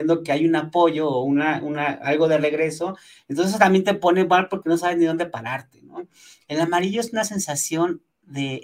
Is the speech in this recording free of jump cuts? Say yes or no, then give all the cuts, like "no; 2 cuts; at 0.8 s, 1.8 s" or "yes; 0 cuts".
yes; 0 cuts